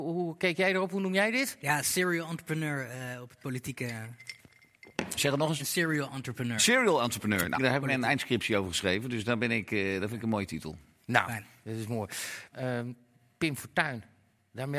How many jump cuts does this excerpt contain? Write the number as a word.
three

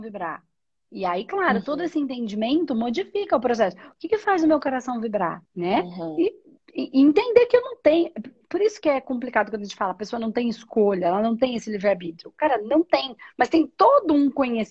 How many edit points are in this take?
one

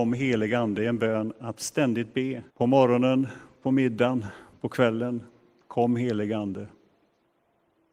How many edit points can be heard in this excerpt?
one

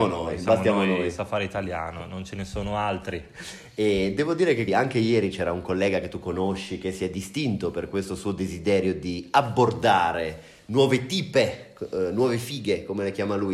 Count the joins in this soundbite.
one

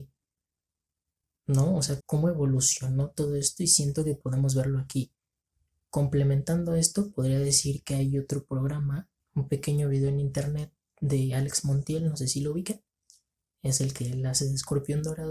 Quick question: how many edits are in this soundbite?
one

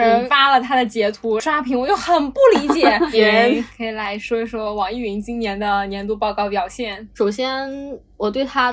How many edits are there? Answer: one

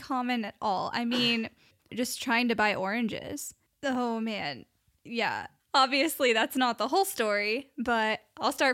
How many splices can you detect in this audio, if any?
three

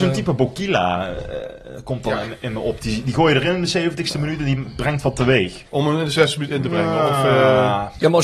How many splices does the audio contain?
one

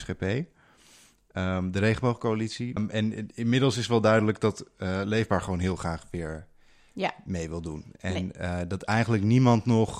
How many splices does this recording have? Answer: one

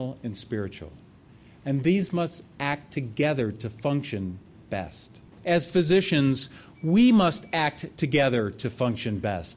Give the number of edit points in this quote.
zero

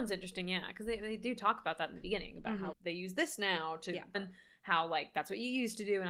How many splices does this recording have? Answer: two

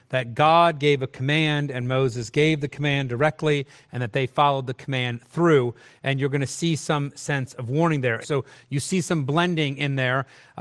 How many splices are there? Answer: one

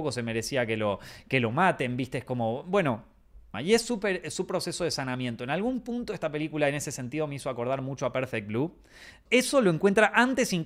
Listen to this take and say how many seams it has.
two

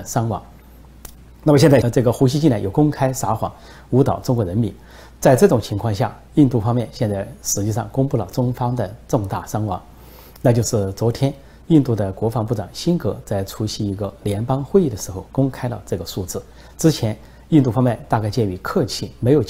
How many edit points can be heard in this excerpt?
one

